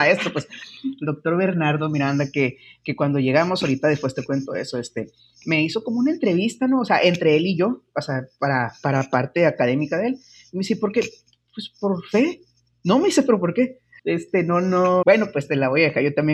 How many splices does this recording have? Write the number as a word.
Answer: two